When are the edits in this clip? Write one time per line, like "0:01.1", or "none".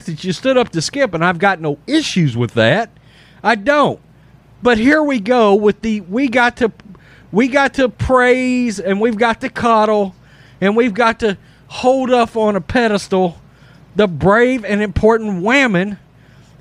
none